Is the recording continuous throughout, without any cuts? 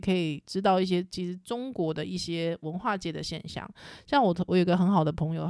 no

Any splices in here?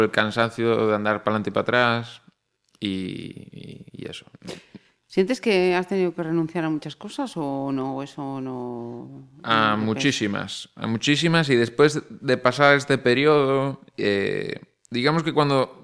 no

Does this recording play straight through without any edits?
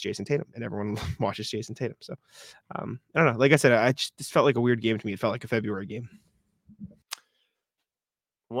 yes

